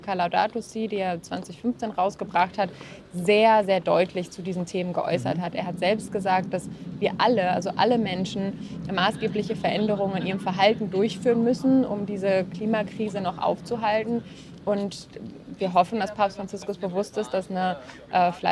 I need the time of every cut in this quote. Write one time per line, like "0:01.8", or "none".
0:05.5